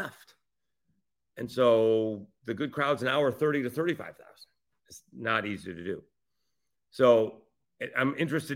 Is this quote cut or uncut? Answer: cut